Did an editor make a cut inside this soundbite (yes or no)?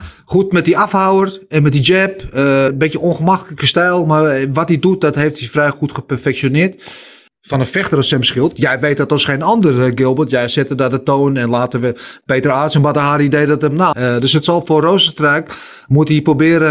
yes